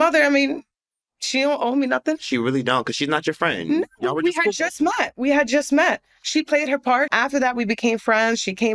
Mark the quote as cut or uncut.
cut